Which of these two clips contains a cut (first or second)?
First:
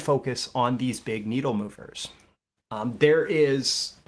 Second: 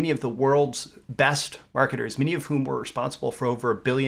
first